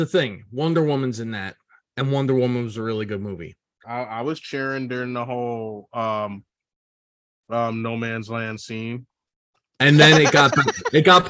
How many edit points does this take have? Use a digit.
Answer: 2